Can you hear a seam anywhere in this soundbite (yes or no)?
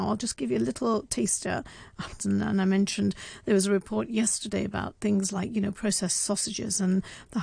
yes